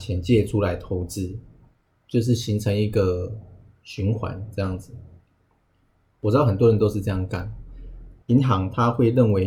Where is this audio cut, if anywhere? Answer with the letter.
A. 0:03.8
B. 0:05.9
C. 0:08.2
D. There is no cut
C